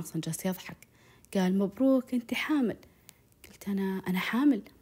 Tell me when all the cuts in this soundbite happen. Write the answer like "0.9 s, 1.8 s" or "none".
none